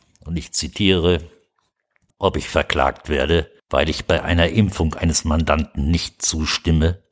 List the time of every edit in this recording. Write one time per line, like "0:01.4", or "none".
0:02.1
0:03.6